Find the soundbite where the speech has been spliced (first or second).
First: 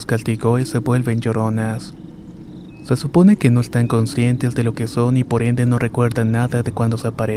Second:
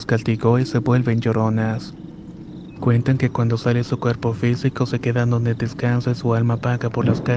second